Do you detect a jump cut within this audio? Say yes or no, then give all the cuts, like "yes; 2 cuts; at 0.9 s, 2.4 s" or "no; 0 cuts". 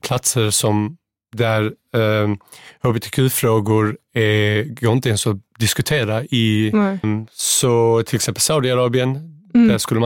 yes; 1 cut; at 7.0 s